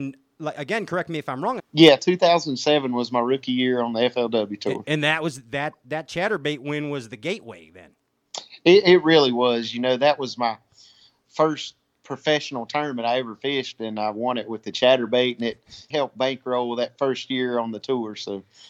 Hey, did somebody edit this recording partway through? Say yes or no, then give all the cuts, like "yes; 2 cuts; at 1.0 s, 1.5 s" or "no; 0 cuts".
yes; 2 cuts; at 1.6 s, 15.9 s